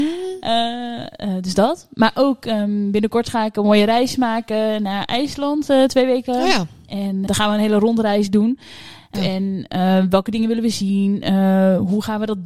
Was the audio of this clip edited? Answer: yes; 2 cuts; at 7.3 s, 9.1 s

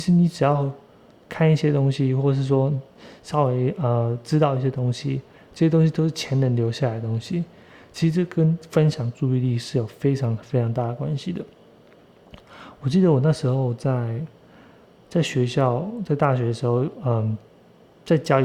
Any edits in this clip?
no; 0 cuts

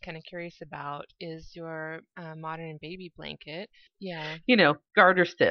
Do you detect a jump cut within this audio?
yes; 1 cut; at 3.9 s

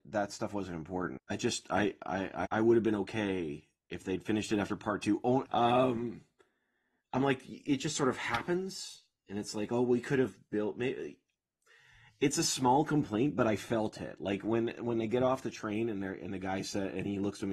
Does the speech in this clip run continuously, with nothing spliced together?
no; 3 cuts; at 1.2 s, 2.5 s, 5.5 s

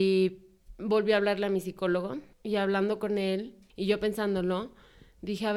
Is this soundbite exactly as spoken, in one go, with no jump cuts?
no; 2 cuts; at 2.3 s, 3.7 s

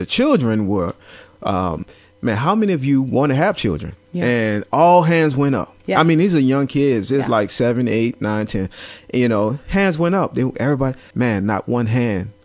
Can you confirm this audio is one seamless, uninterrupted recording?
no; 1 cut; at 11.1 s

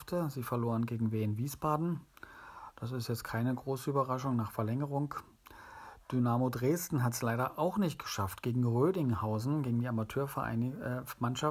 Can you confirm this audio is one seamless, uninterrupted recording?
yes; 0 cuts

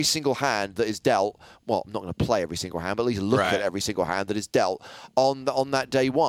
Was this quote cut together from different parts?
no; 0 cuts

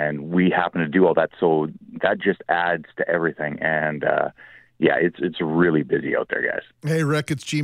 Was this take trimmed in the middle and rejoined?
no; 0 cuts

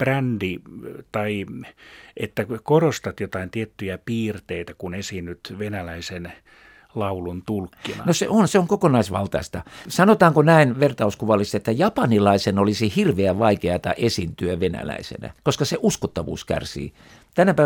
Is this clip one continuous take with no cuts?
no; 2 cuts; at 9.9 s, 15.4 s

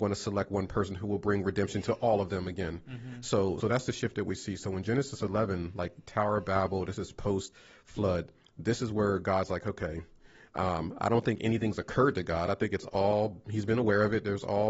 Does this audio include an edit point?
yes; 1 cut; at 3.6 s

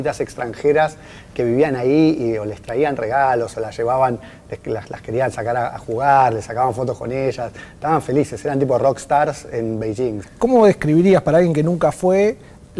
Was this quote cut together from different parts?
yes; 1 cut; at 10.2 s

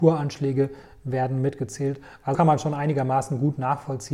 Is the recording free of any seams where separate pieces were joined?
no; 1 cut; at 2.3 s

